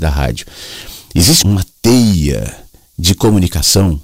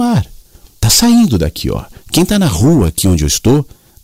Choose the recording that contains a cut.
first; 1 cut; at 1.4 s

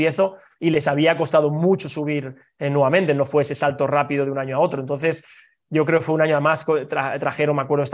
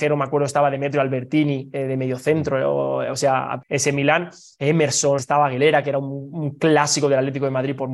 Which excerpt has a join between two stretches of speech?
second; 2 cuts; at 3.6 s, 5.2 s

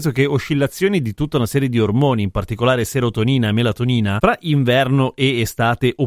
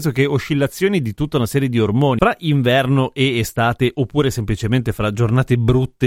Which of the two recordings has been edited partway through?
second; 1 cut; at 2.2 s

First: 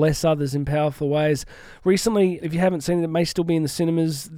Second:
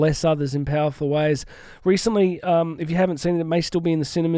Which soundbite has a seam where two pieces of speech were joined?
first; 1 cut; at 2.4 s

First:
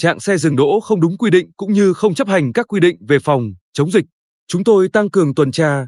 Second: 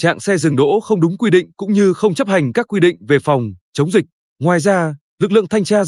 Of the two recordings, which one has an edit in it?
second; 1 cut; at 4.2 s

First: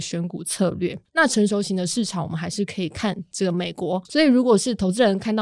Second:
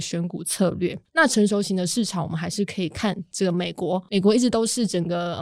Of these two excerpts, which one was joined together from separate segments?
first; 1 cut; at 4.0 s

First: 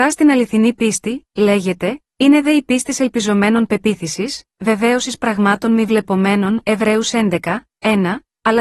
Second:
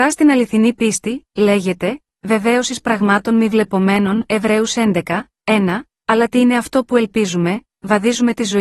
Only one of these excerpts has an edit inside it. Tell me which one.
second; 1 cut; at 2.1 s

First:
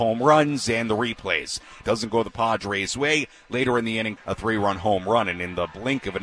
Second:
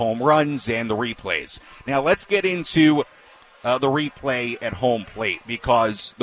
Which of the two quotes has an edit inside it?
first; 2 cuts; at 1.8 s, 4.2 s

